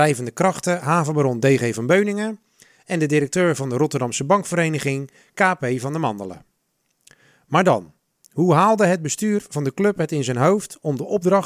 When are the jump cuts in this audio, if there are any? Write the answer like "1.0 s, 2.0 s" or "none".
none